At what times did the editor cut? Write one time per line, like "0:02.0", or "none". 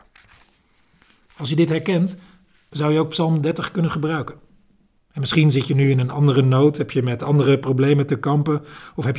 0:05.0